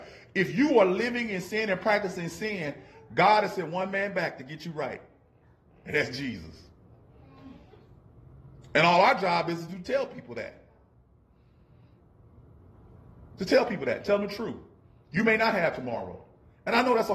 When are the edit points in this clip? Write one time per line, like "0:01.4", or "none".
none